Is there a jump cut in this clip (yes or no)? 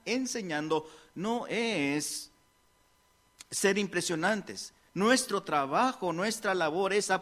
no